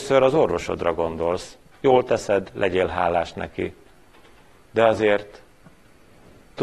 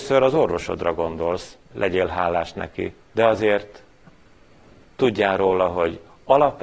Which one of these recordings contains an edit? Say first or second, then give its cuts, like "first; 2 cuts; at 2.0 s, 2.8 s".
second; 2 cuts; at 1.7 s, 3.0 s